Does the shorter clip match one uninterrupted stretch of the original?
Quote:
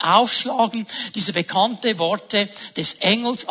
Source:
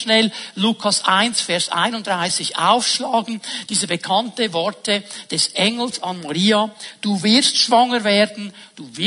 yes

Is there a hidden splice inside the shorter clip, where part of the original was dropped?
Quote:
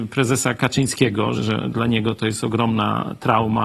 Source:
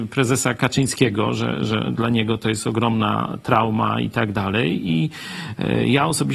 yes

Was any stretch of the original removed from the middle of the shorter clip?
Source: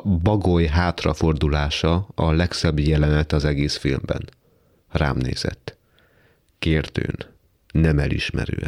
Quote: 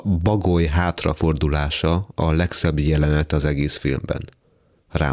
no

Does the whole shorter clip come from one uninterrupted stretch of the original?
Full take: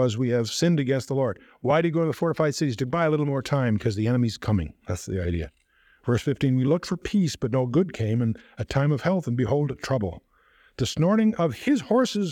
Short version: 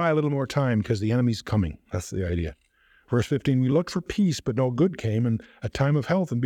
yes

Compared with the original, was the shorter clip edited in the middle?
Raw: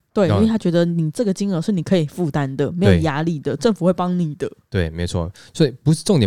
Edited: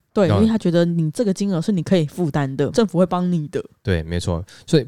yes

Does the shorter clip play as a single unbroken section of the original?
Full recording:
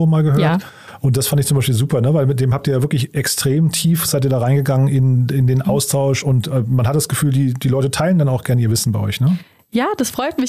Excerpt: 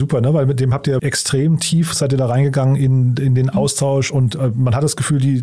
no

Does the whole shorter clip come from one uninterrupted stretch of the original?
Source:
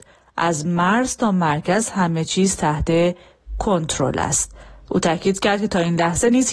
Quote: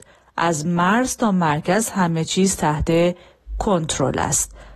yes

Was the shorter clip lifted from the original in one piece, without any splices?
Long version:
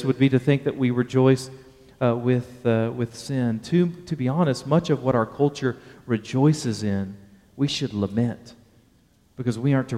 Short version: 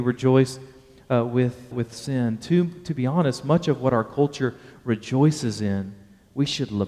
no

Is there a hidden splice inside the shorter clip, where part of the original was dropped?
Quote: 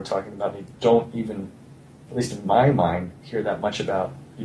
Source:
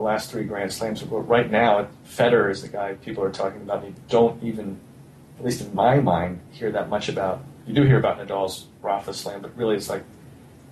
no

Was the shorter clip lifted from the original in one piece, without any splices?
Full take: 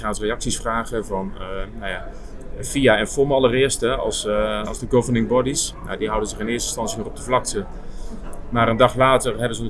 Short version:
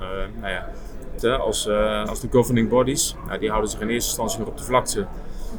no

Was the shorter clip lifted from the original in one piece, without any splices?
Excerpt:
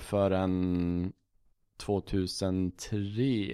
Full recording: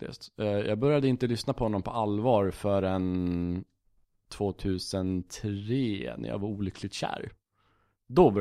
yes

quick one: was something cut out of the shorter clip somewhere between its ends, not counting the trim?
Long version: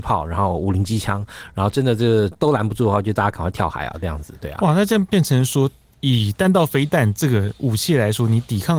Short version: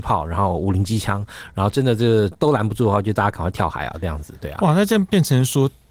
no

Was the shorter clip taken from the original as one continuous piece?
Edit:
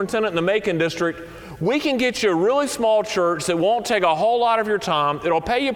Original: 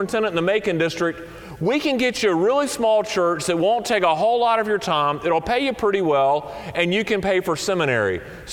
yes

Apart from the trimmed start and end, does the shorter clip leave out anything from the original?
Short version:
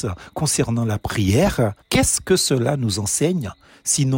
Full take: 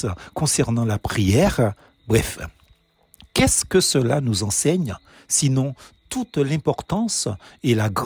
yes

